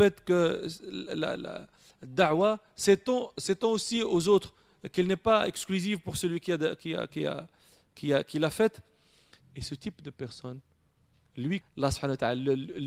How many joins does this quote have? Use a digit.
3